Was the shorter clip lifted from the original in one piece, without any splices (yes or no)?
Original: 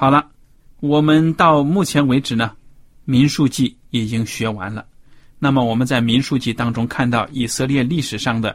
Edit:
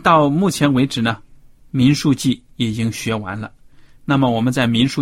yes